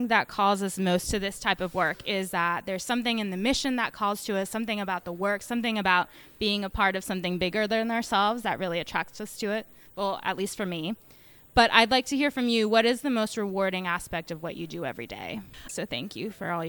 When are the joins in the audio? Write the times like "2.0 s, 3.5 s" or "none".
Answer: 15.7 s